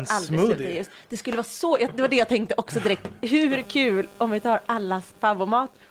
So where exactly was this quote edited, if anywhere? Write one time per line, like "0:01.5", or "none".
none